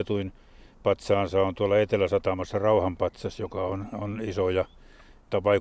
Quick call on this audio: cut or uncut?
uncut